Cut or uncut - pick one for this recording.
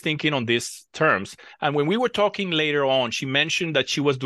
cut